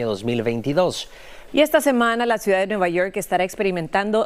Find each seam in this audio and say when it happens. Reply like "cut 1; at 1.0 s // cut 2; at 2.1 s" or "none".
cut 1; at 1.5 s